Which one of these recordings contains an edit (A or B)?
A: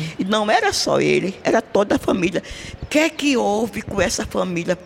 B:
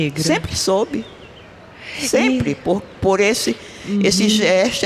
A